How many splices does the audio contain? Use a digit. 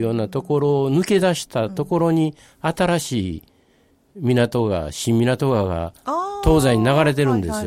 0